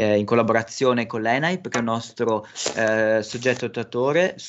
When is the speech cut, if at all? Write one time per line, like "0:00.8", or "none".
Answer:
none